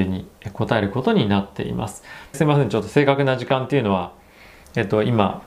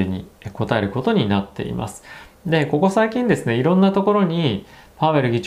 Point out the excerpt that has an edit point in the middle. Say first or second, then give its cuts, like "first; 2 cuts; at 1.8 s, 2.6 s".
first; 1 cut; at 2.3 s